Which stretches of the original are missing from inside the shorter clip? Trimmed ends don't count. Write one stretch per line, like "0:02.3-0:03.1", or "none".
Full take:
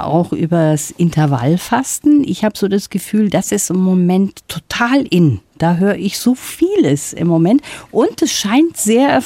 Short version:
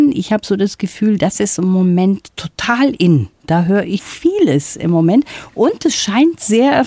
0:06.1-0:06.4